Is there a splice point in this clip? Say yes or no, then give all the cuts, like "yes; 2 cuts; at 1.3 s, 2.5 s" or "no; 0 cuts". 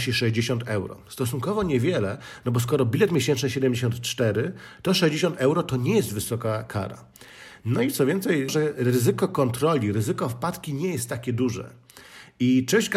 yes; 1 cut; at 8.5 s